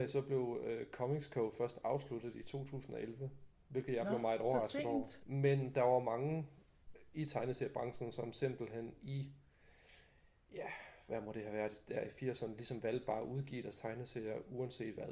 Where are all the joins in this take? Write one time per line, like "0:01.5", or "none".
0:05.2